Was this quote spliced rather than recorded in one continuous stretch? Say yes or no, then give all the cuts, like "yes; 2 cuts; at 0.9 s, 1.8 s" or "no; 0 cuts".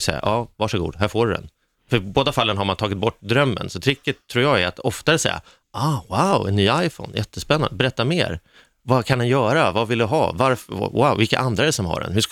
no; 0 cuts